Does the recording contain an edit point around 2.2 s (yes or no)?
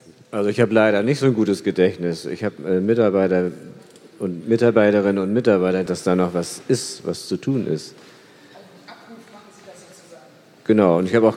no